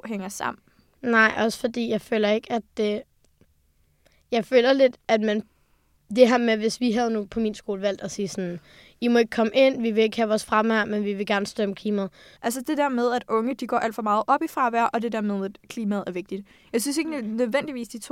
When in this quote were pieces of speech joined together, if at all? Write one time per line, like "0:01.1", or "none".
0:12.4